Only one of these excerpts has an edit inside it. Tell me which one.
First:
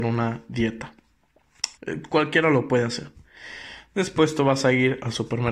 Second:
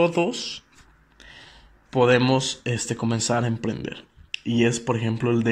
first; 1 cut; at 1.8 s

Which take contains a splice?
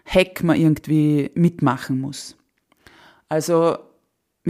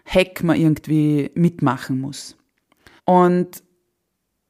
second; 1 cut; at 3.0 s

